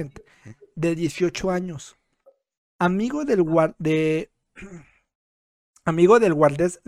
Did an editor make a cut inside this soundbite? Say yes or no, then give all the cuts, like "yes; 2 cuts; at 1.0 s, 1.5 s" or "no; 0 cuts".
no; 0 cuts